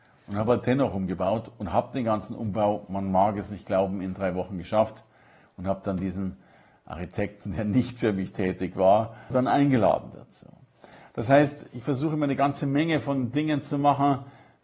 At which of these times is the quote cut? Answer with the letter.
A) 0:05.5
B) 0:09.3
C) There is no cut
B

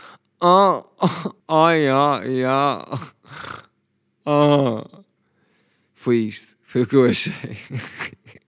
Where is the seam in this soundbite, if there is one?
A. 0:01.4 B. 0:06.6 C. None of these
A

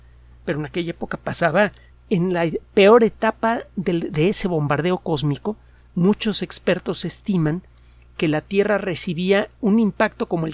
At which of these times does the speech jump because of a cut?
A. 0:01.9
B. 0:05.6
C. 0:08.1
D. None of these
A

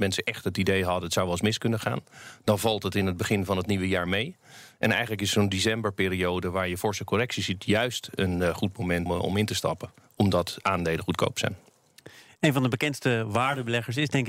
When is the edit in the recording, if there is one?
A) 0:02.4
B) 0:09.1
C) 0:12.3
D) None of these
B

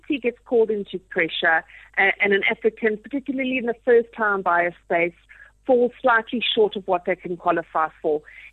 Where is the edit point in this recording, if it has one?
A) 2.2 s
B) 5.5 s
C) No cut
C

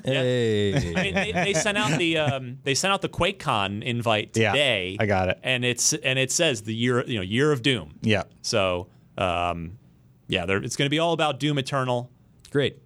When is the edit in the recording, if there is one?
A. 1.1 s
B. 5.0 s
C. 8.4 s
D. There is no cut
D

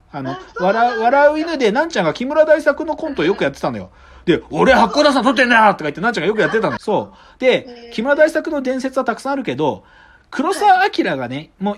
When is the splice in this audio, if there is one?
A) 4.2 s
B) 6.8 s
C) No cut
B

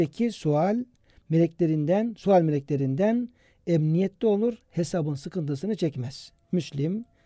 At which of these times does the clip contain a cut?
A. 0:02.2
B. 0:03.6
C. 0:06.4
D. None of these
D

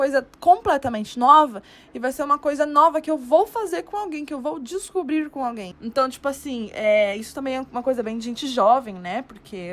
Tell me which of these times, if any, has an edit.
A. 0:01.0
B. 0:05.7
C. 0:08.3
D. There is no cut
B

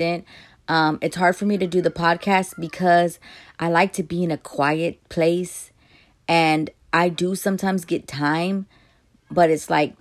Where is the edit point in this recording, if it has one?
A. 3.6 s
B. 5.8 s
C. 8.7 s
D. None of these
D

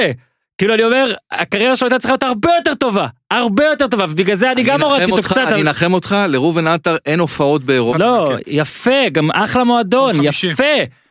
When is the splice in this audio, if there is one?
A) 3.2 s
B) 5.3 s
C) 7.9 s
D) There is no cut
C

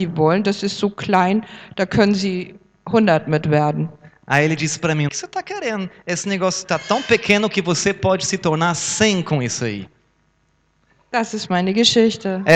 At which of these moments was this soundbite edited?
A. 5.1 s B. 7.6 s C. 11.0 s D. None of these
A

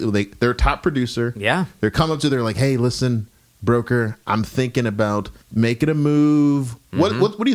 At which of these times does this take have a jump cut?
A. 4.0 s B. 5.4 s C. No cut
B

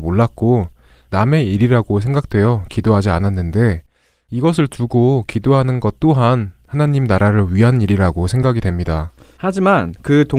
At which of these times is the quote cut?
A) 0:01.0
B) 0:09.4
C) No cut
B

